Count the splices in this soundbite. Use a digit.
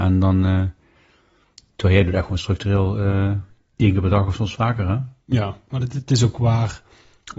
1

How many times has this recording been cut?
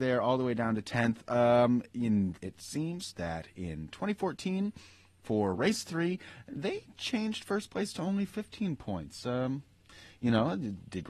1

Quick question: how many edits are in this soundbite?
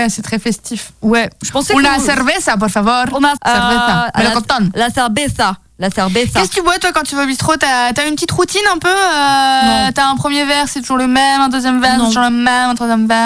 1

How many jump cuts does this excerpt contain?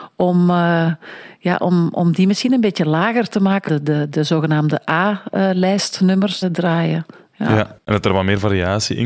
2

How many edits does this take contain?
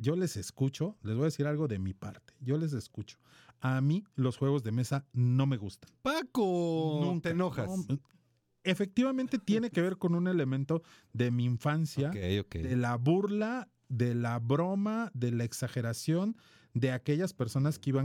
0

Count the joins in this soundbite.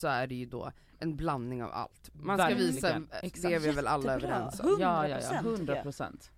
1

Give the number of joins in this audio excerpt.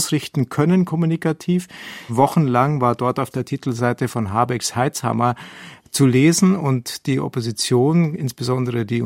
1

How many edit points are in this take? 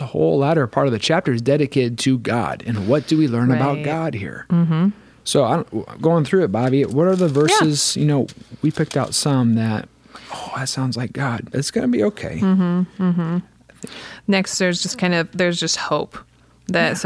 1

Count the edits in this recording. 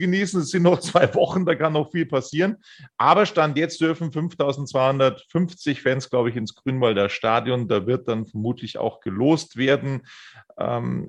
0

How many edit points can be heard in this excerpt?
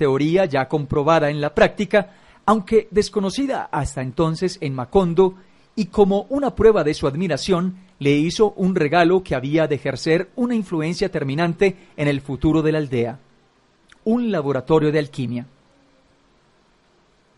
0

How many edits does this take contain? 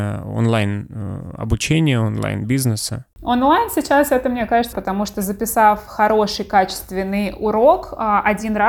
1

